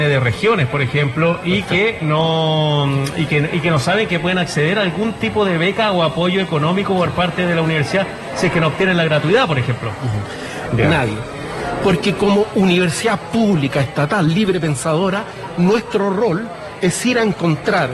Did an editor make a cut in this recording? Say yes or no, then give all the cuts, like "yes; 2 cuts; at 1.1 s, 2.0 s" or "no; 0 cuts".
yes; 1 cut; at 10.7 s